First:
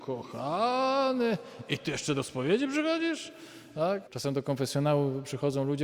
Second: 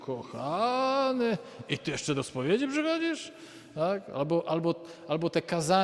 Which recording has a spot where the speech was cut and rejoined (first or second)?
first